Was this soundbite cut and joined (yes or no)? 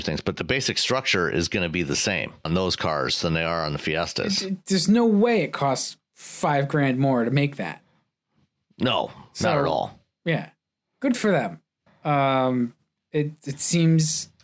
yes